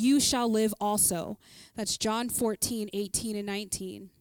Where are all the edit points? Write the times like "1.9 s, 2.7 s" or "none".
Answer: none

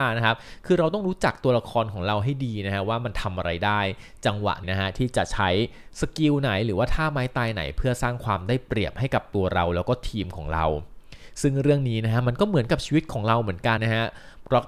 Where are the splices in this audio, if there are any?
4.6 s, 13.8 s

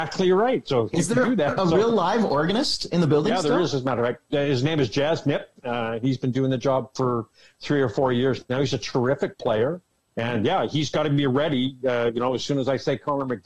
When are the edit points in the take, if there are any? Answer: none

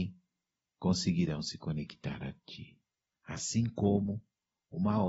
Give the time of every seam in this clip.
3.1 s

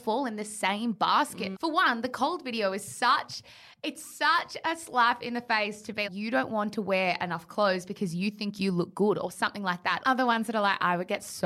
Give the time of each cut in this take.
1.5 s, 6.0 s, 10.0 s

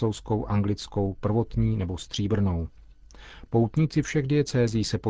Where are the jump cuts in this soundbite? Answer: none

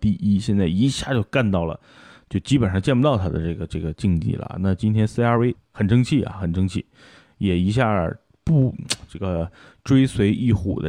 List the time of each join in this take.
5.6 s

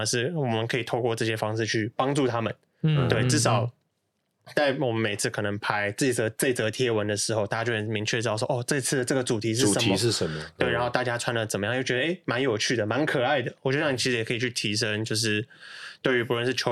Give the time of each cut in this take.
none

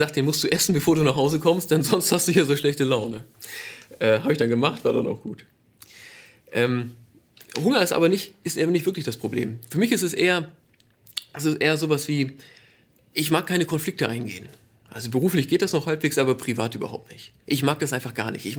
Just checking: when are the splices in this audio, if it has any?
none

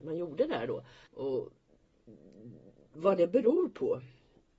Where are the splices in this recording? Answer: 1.1 s

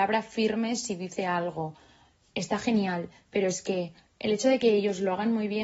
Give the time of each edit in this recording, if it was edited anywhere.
none

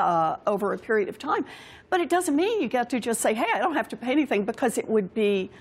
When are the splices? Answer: none

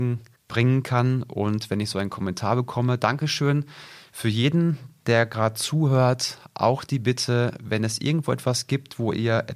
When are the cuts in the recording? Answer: none

